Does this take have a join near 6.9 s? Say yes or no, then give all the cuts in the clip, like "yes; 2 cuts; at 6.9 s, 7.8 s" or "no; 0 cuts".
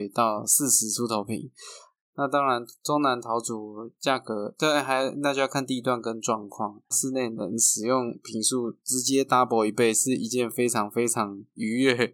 yes; 2 cuts; at 2.0 s, 6.9 s